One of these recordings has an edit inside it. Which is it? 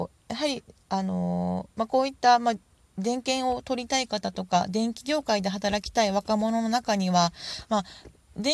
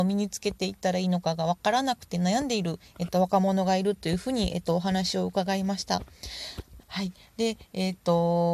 second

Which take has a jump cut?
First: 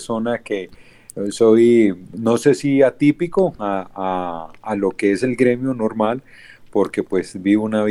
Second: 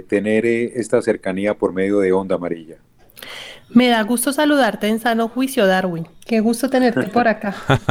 second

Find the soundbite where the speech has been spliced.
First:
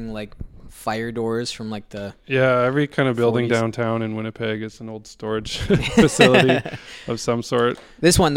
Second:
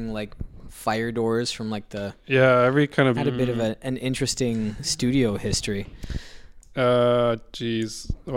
second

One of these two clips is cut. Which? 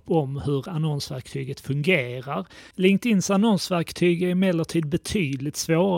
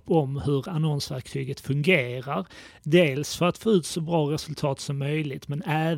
first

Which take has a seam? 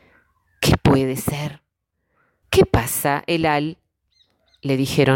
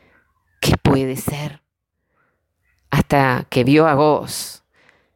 first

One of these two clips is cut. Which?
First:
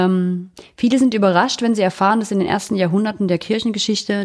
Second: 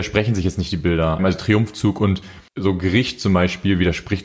second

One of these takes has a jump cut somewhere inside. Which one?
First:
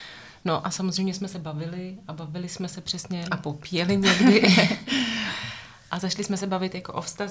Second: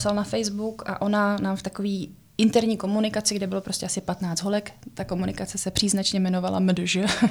first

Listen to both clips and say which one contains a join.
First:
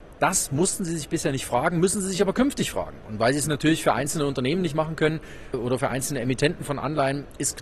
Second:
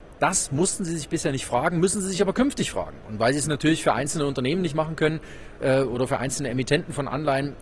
first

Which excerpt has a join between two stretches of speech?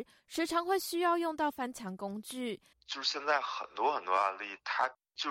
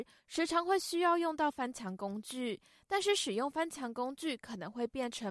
first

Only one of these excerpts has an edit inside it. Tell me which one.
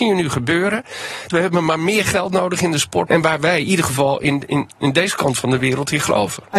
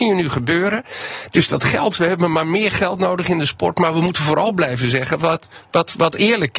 first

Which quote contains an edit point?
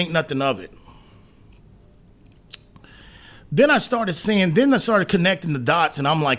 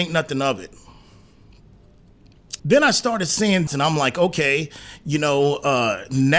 second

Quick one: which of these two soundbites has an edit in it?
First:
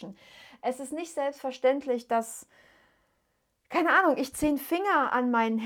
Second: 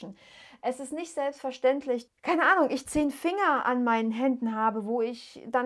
second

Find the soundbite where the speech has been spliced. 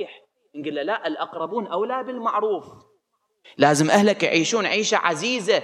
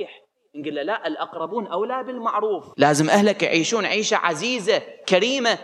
second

